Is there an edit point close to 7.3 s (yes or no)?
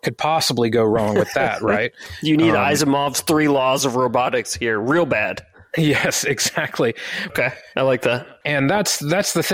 yes